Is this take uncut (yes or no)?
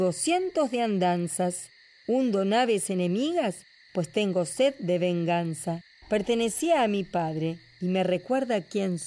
no